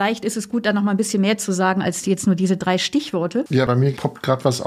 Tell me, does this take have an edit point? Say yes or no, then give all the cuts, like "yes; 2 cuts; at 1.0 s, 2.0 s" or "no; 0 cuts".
no; 0 cuts